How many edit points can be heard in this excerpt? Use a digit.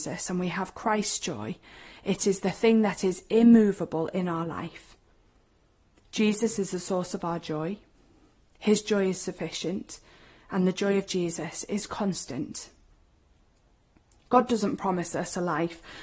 0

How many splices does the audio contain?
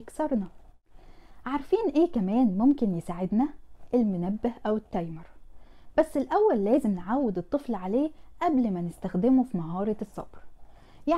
0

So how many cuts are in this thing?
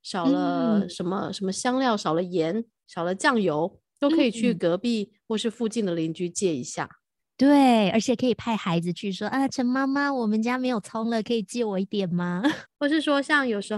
1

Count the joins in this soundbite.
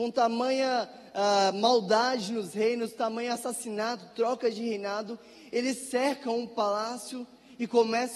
0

